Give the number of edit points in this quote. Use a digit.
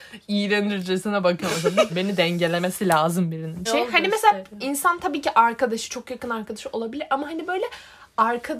2